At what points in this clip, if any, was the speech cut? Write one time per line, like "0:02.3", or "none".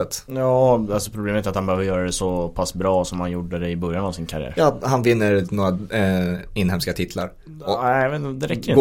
none